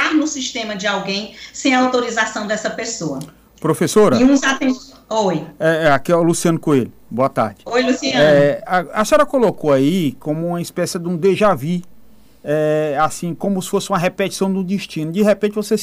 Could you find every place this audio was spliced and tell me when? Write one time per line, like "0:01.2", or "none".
none

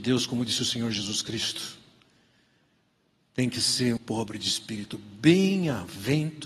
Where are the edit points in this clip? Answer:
0:04.0

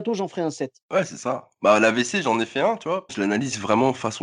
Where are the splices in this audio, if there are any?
0:03.1

